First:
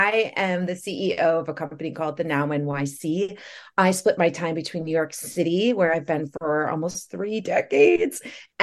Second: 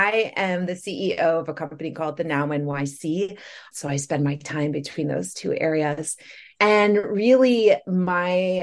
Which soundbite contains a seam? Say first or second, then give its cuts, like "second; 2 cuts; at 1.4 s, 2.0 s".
second; 1 cut; at 3.7 s